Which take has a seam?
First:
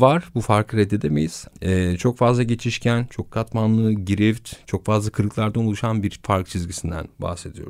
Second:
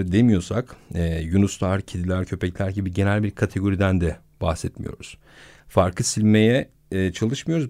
first; 1 cut; at 1.5 s

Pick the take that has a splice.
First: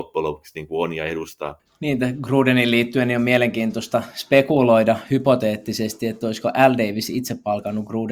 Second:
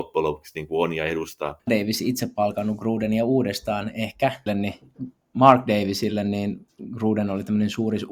second; 2 cuts; at 1.7 s, 4.5 s

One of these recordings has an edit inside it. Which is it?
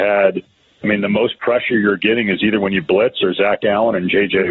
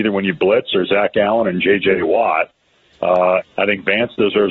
second; 1 cut; at 3.4 s

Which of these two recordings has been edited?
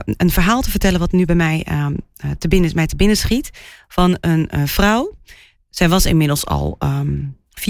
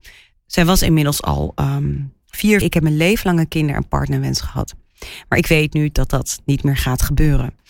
second; 1 cut; at 2.6 s

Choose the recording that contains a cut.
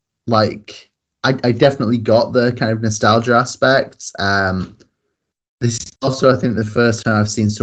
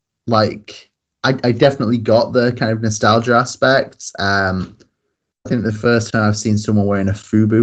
second; 1 cut; at 5.5 s

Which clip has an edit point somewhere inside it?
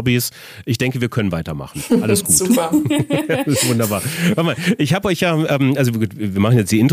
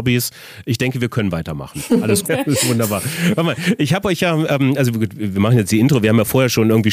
second; 1 cut; at 2.3 s

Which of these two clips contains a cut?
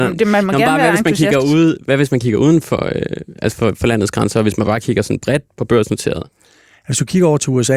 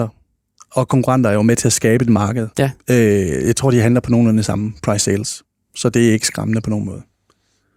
second; 1 cut; at 2.5 s

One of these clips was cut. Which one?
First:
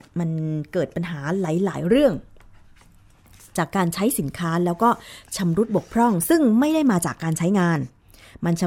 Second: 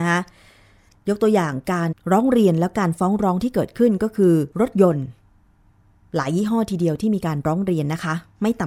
second; 2 cuts; at 1.9 s, 4.5 s

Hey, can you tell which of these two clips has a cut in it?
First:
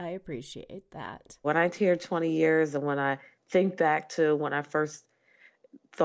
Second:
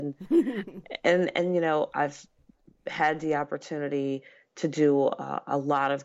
first; 1 cut; at 1.4 s

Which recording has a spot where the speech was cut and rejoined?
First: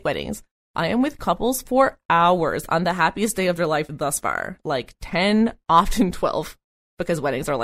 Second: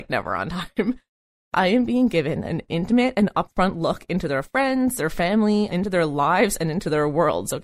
second; 1 cut; at 5.7 s

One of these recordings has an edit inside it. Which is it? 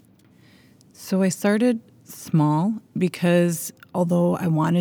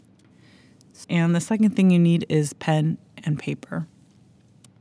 second; 1 cut; at 1.0 s

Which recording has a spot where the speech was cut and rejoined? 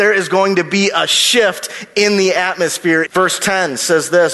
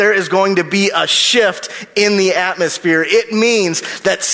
first; 1 cut; at 3.1 s

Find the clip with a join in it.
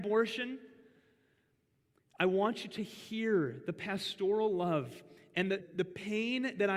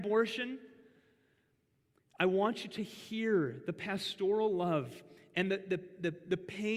first; 1 cut; at 5.6 s

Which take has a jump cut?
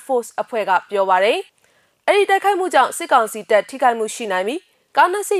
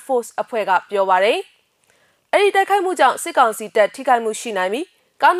first; 1 cut; at 1.5 s

